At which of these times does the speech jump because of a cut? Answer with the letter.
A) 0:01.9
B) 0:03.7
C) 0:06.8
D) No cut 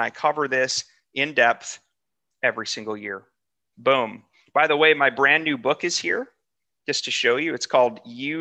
B